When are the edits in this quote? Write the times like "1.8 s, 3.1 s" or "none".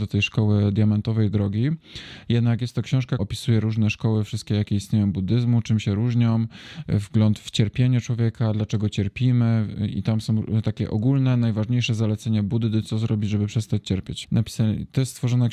3.2 s, 6.8 s, 14.2 s